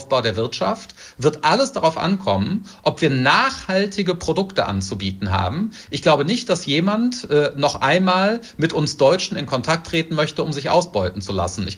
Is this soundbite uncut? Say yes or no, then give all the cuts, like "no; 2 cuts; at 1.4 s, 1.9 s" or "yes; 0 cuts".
yes; 0 cuts